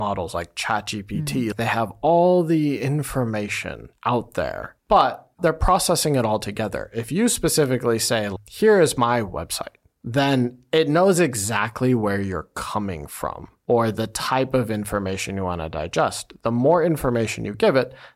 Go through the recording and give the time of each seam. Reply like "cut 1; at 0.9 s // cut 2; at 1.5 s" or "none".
cut 1; at 9.8 s